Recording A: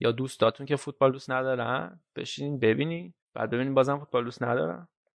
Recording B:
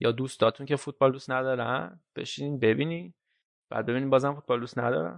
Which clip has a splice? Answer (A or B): A